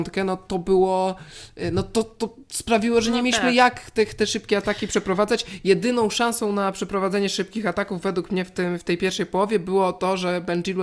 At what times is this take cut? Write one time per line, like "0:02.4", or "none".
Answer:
none